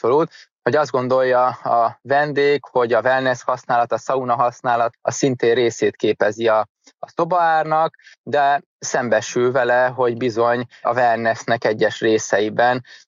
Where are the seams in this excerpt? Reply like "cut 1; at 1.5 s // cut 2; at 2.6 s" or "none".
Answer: cut 1; at 4.9 s